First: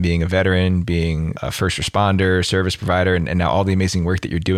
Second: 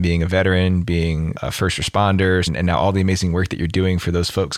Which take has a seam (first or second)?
second